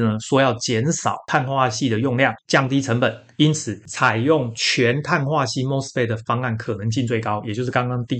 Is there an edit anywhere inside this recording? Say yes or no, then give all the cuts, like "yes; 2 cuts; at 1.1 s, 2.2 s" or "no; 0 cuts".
yes; 1 cut; at 2.4 s